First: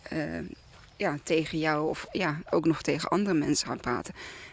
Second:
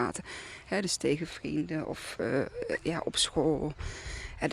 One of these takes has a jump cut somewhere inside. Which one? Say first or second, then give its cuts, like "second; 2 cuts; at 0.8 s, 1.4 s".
first; 1 cut; at 2.1 s